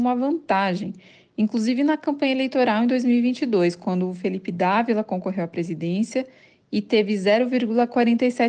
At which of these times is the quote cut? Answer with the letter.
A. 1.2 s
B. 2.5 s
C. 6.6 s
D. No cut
D